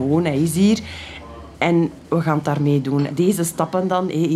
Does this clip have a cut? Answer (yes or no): yes